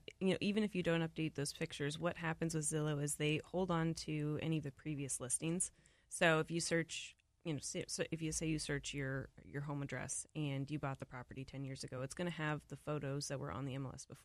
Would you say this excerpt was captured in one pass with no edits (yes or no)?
yes